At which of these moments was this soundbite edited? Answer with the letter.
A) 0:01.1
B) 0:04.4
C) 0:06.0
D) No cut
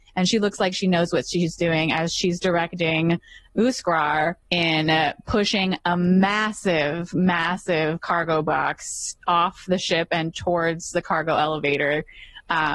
B